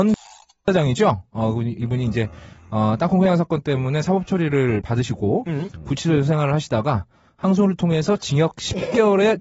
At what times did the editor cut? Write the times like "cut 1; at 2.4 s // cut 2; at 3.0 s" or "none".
none